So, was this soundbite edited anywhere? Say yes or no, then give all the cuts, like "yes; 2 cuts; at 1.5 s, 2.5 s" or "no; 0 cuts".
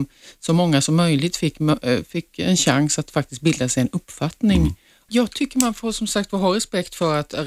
yes; 1 cut; at 5.1 s